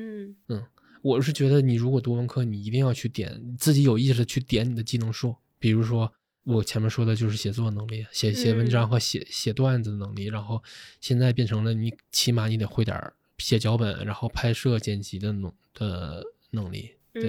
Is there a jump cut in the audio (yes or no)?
no